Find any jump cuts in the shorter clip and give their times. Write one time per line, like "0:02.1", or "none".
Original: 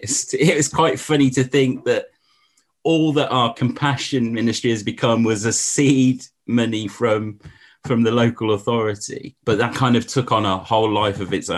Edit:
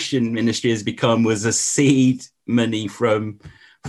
none